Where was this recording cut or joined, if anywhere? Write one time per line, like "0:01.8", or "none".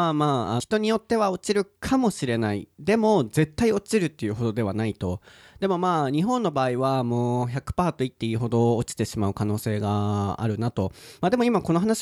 none